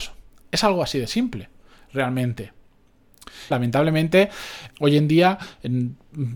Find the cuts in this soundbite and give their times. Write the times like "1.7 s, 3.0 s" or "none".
3.5 s, 4.7 s